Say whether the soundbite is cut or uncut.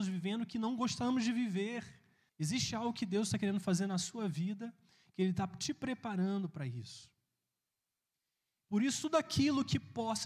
cut